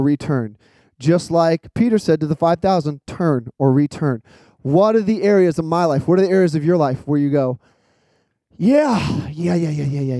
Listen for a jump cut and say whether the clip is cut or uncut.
uncut